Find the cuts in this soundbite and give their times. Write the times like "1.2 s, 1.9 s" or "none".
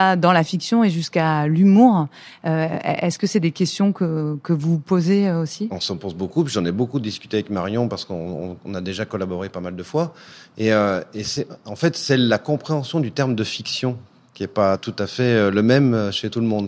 none